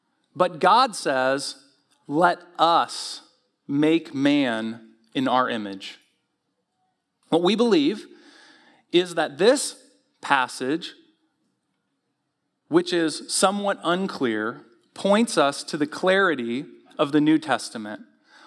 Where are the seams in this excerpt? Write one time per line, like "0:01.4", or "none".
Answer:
0:07.2

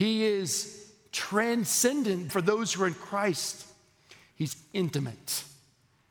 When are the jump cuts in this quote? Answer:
0:02.3

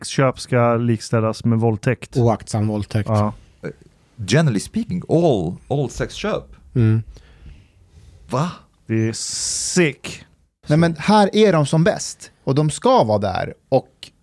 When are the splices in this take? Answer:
0:10.6

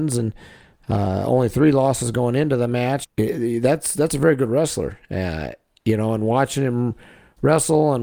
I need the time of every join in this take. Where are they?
0:03.0

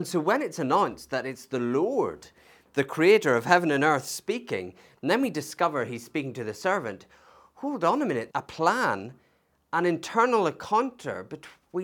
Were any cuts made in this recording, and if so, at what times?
0:08.3

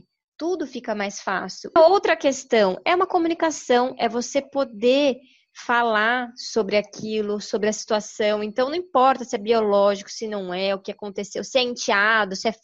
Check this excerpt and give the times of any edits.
0:01.8

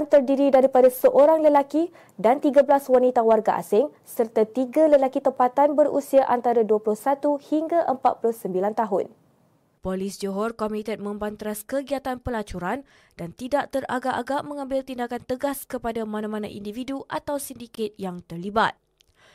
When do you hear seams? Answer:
0:09.8

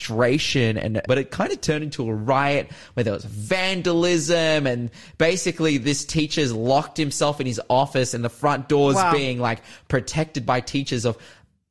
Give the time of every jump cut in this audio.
0:01.1

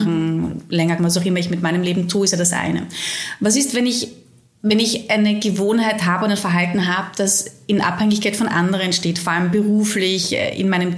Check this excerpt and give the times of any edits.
0:01.0

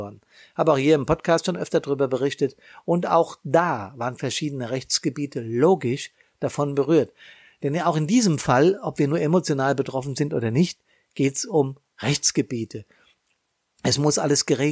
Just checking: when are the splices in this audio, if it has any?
none

